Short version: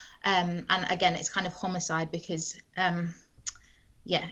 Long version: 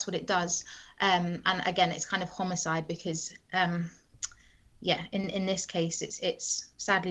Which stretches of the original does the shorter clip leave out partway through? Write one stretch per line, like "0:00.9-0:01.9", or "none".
none